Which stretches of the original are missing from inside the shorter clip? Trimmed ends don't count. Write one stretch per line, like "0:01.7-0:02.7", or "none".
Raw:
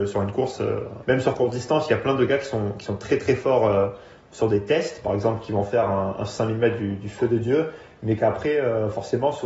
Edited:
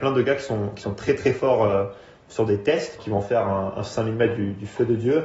0:05.0-0:05.4

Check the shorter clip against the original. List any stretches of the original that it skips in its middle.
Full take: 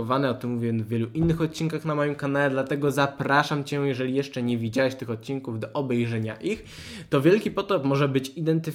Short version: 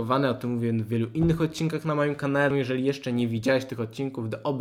0:02.5-0:03.8

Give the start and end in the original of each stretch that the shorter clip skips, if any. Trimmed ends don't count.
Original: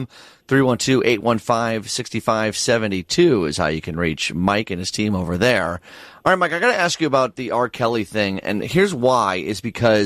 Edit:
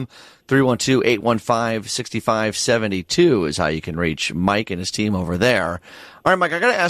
none

